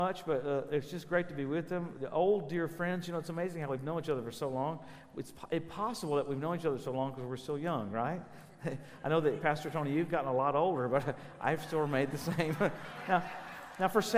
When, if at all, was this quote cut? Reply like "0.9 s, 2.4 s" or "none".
none

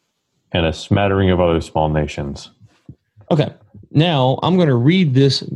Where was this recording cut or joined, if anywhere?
none

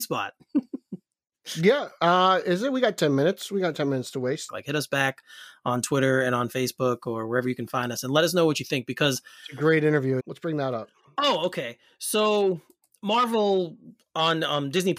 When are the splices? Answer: 4.5 s, 10.2 s

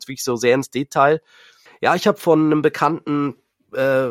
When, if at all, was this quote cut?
1.7 s

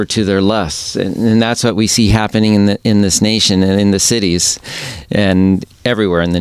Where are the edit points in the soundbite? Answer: none

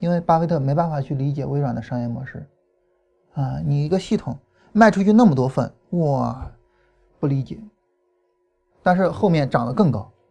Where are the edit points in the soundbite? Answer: 8.7 s

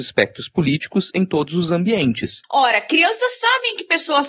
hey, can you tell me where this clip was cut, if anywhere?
2.4 s

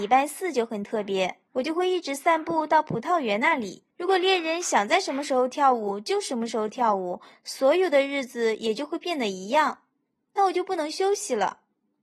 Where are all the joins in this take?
1.5 s, 3.9 s

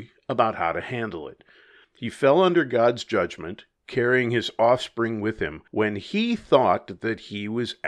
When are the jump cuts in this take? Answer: 1.8 s, 5.7 s

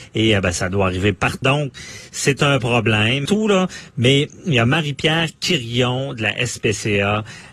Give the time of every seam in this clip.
1.4 s, 3.3 s

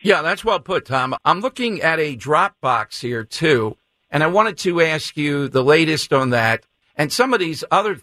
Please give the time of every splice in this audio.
1.2 s, 6.8 s

